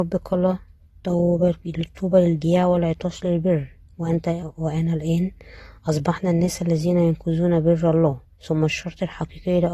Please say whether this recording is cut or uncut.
cut